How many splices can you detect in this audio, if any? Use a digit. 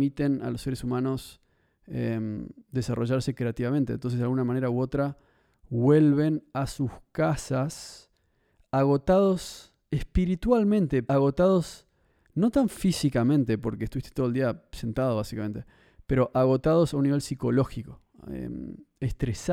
1